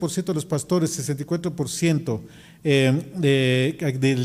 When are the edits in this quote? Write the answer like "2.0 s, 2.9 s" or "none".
none

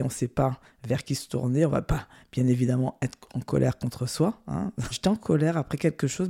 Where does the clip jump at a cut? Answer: 4.9 s

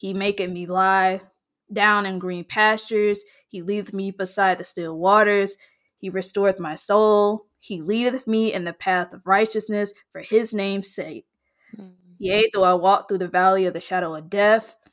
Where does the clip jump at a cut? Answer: none

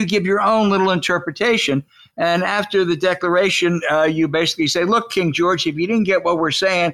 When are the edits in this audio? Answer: none

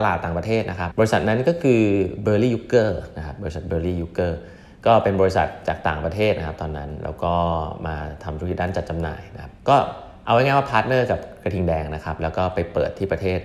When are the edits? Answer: 0.9 s, 9.6 s

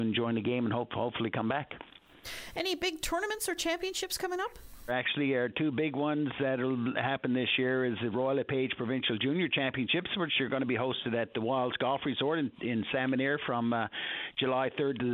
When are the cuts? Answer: 4.9 s

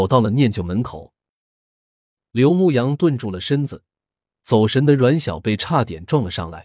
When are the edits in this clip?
none

